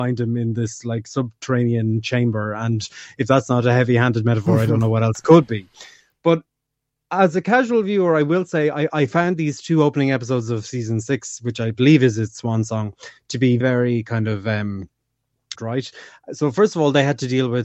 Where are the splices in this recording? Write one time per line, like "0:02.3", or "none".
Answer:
0:13.6
0:15.5